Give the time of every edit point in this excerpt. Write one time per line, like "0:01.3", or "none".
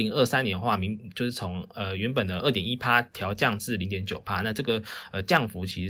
none